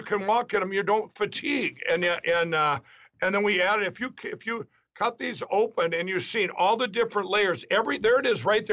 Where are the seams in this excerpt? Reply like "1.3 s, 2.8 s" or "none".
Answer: none